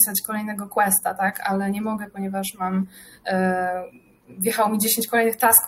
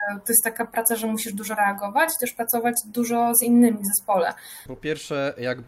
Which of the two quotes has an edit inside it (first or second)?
second